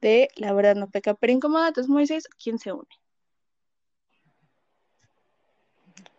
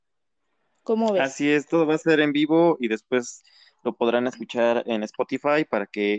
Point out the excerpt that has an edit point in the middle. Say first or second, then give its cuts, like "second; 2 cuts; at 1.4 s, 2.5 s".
first; 1 cut; at 2.3 s